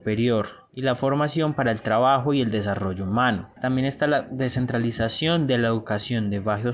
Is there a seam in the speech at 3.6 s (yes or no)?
yes